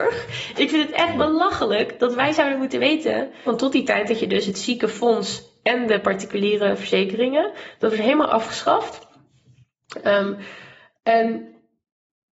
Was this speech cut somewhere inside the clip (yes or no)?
yes